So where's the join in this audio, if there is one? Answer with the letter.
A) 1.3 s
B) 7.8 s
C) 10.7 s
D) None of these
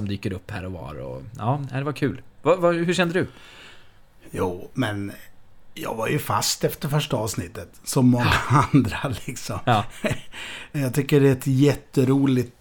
C